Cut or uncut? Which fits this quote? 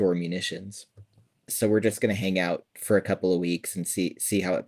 cut